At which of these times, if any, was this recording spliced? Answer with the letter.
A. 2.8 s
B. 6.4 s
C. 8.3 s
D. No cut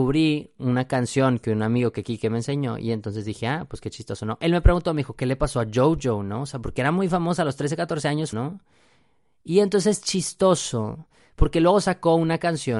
C